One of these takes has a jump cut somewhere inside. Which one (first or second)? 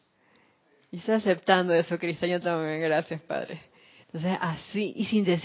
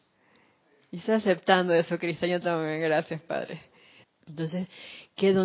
second